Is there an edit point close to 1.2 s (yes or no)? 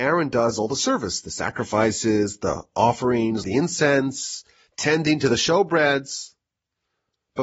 no